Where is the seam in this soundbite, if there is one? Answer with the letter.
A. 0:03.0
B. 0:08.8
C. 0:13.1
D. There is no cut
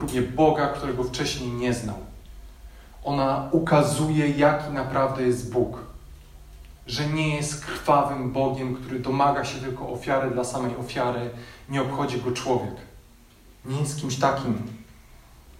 D